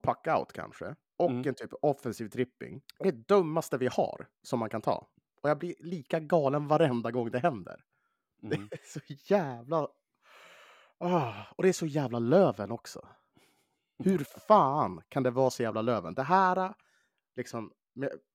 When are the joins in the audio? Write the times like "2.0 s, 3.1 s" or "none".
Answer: 2.9 s